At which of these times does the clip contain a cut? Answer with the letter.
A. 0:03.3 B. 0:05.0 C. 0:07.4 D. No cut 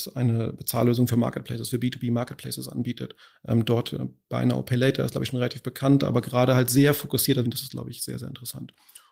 C